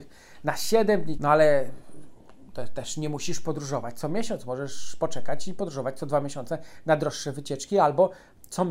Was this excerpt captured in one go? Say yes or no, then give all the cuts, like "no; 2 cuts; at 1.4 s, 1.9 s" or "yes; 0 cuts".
no; 1 cut; at 1.2 s